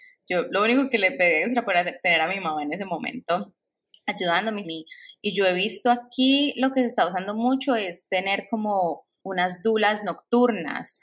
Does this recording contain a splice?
yes; 2 cuts; at 4.6 s, 9.2 s

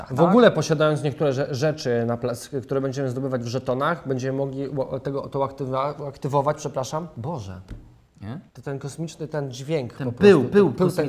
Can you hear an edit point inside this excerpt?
yes; 1 cut; at 8.5 s

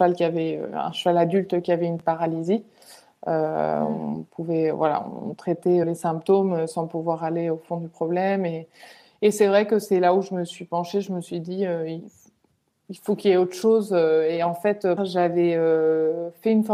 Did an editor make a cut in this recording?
yes; 2 cuts; at 5.8 s, 15.0 s

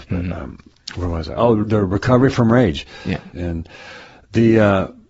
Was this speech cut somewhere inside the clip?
yes; 2 cuts; at 1.6 s, 3.3 s

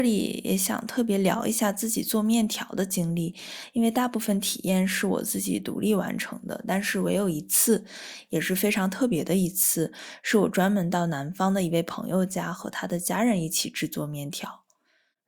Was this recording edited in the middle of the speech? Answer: no; 0 cuts

